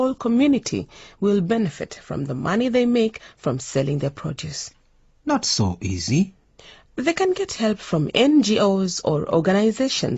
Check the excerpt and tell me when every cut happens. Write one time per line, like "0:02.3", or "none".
none